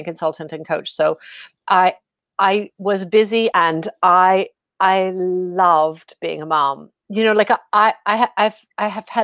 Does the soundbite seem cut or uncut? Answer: cut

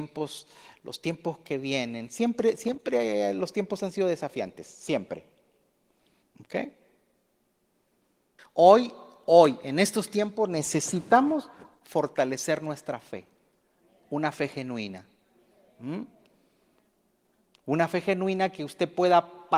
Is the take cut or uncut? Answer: cut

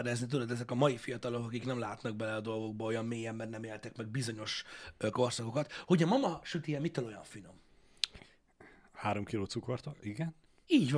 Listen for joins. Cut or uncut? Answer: uncut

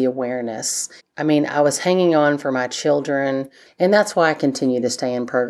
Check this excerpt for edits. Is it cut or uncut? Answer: cut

